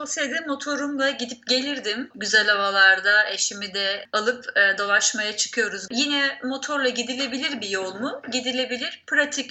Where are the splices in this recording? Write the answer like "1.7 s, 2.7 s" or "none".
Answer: 2.1 s, 5.9 s